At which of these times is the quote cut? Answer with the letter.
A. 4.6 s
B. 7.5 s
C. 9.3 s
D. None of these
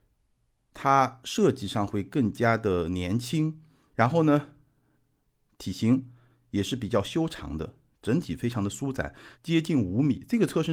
C